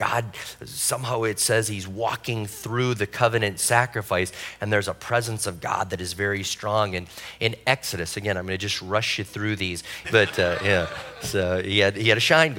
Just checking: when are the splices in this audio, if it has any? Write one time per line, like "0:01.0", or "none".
0:10.0